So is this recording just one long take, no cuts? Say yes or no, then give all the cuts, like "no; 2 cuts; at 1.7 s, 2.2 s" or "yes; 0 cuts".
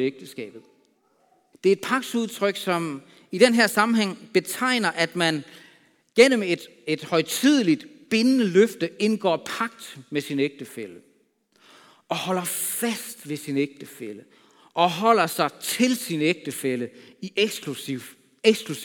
no; 1 cut; at 1.5 s